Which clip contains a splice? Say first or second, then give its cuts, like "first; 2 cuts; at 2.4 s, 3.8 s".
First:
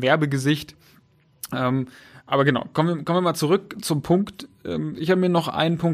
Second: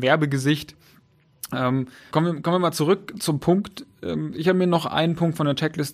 second; 1 cut; at 2.1 s